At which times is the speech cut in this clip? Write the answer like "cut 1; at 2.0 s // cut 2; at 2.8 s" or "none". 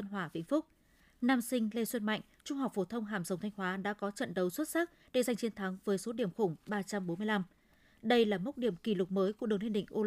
none